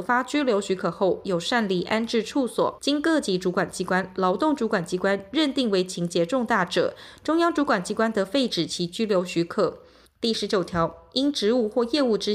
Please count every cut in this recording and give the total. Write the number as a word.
two